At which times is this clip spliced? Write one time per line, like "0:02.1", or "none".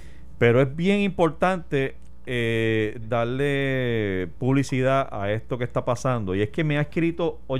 0:03.0